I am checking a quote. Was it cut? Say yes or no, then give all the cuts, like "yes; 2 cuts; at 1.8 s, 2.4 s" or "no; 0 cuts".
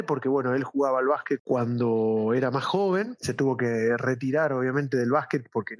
yes; 1 cut; at 1.4 s